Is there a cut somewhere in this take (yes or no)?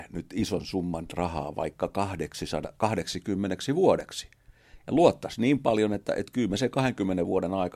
no